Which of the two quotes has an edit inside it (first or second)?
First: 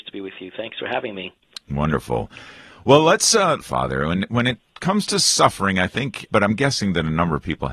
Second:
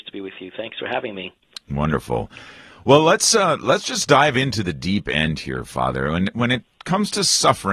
first